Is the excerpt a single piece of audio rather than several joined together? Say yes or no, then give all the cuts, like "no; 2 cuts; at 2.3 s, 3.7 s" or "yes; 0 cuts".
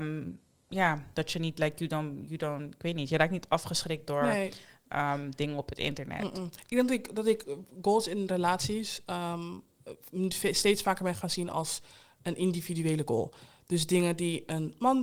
yes; 0 cuts